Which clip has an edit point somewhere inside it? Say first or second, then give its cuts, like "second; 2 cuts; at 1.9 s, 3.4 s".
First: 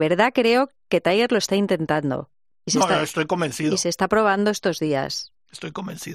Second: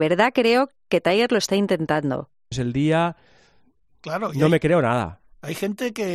second; 1 cut; at 2.5 s